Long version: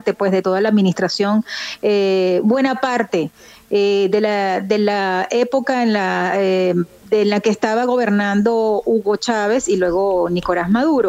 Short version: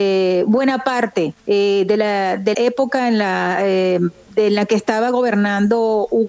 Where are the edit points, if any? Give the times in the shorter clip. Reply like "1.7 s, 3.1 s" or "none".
1.4 s, 2.5 s